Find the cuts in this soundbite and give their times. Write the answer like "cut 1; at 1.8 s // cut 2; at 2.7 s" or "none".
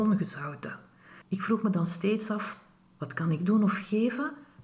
cut 1; at 1.2 s

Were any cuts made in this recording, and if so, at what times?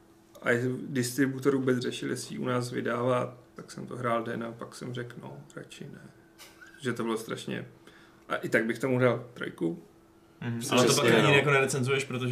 cut 1; at 3.6 s // cut 2; at 10.6 s

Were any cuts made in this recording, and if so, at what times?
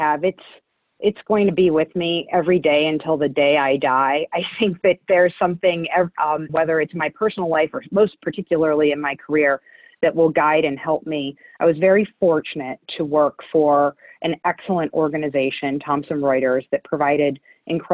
cut 1; at 6.5 s

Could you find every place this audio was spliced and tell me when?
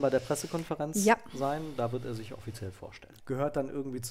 cut 1; at 3.2 s

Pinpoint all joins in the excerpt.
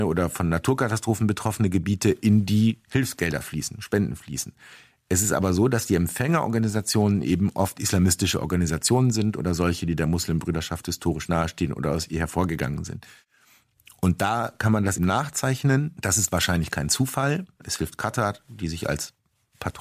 cut 1; at 15.0 s // cut 2; at 17.6 s

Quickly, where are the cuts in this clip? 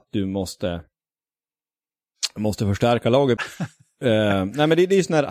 cut 1; at 3.4 s

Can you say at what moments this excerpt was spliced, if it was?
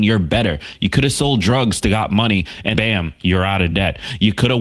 cut 1; at 2.7 s

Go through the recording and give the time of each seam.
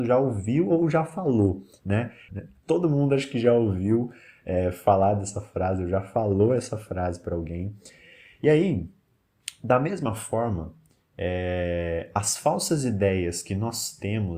cut 1; at 2.3 s

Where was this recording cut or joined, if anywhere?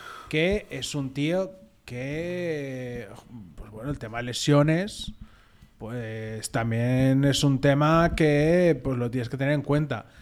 none

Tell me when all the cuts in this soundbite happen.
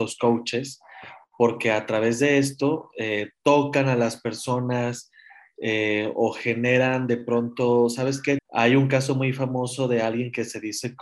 cut 1; at 8.4 s

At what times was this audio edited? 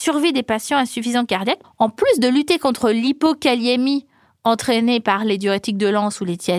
cut 1; at 1.6 s

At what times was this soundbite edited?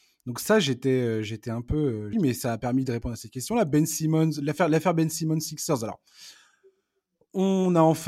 cut 1; at 2.1 s

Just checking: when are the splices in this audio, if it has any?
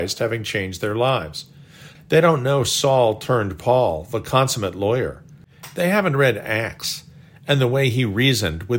cut 1; at 2.0 s

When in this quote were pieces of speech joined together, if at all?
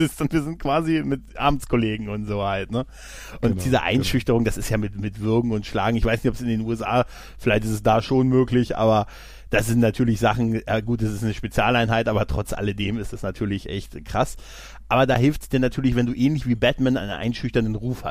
none

